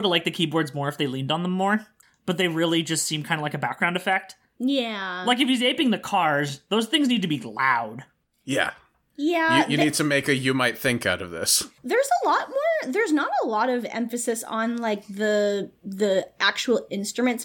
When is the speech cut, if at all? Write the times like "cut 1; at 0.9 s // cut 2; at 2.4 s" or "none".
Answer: cut 1; at 11.8 s